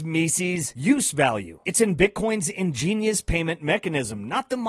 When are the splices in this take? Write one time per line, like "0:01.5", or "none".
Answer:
none